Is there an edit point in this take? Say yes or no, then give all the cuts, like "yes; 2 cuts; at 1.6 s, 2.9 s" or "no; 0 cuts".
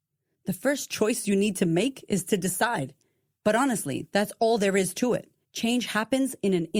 yes; 2 cuts; at 3.4 s, 5.4 s